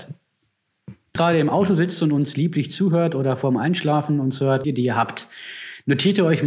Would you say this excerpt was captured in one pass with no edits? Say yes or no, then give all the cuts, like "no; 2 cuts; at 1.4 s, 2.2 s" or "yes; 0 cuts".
no; 2 cuts; at 1.2 s, 4.6 s